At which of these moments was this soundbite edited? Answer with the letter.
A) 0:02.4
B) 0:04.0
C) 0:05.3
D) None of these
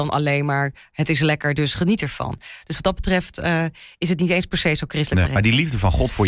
C